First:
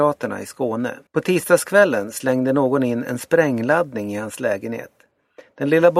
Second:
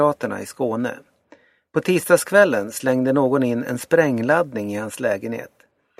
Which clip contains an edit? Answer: first; 1 cut; at 1.1 s

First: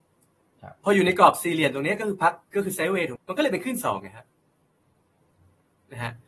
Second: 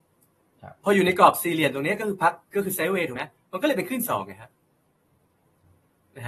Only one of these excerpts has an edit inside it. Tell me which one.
first; 1 cut; at 3.2 s

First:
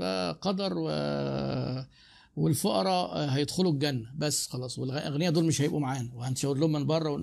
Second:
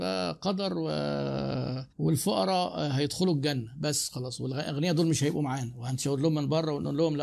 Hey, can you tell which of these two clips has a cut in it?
second; 1 cut; at 1.9 s

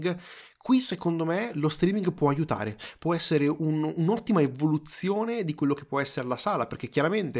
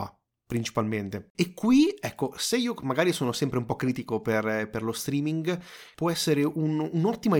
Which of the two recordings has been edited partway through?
second; 2 cuts; at 1.3 s, 5.9 s

